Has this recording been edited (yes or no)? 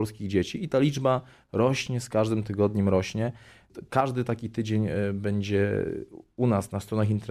yes